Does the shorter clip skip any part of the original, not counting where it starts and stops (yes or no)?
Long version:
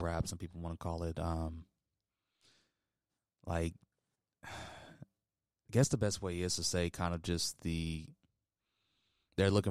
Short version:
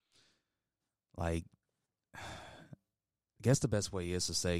no